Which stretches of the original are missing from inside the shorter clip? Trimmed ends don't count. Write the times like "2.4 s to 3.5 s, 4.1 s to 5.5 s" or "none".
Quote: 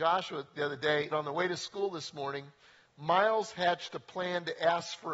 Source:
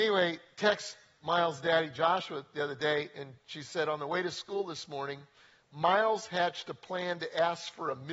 3.1 s to 3.9 s